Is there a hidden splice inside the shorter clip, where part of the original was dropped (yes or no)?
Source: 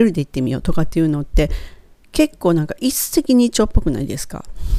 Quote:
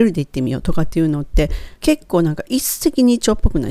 yes